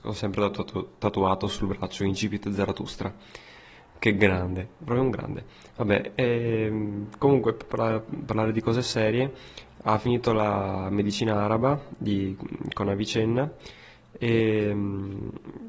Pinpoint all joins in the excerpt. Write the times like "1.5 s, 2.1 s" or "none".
none